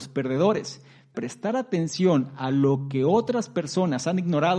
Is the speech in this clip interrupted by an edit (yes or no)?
yes